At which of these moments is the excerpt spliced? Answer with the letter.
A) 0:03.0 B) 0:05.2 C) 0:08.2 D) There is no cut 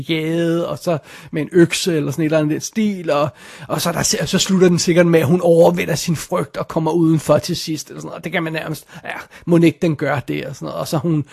D